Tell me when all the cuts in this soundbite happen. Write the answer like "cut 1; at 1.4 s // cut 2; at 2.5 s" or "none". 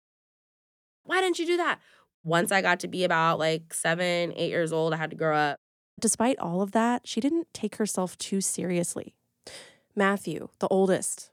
cut 1; at 1.0 s